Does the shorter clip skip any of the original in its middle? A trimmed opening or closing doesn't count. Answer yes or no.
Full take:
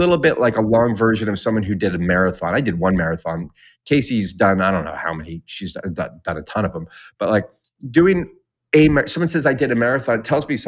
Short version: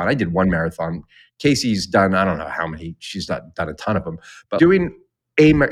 yes